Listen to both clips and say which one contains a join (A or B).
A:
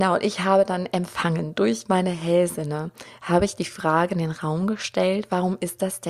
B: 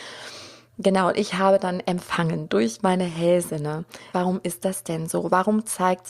B